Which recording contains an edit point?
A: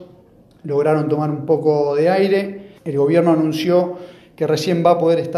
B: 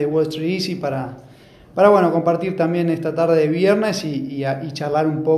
A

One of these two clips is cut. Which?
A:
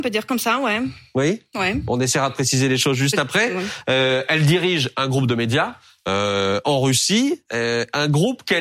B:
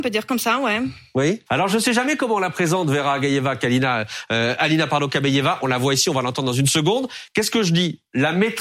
B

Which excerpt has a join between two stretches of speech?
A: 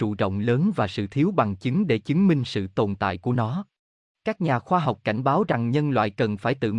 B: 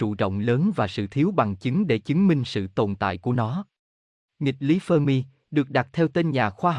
A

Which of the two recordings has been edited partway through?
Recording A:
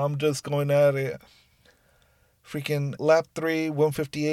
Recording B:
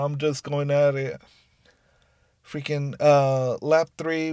A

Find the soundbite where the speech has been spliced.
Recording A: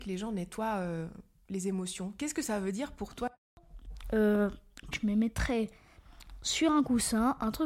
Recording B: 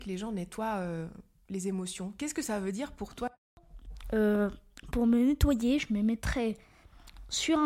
A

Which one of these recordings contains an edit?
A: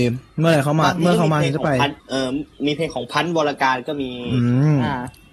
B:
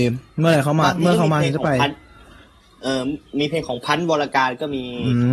A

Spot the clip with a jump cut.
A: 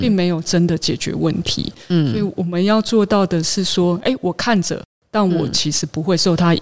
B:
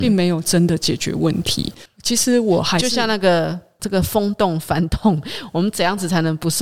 B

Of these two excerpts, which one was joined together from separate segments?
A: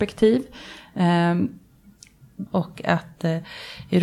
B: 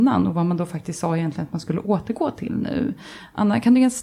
A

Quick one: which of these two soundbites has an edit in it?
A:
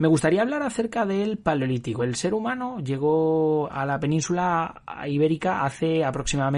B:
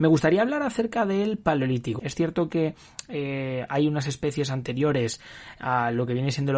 B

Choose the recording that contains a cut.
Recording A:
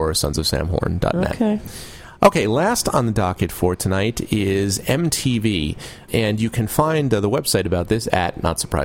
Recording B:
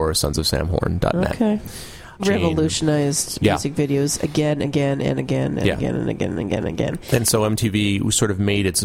B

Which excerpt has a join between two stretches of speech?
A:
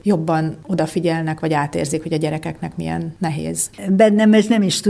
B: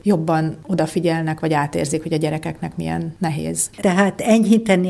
B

